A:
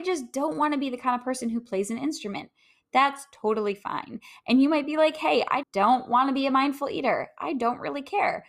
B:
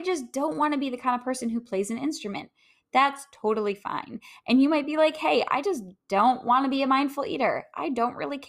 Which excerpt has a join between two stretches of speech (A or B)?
A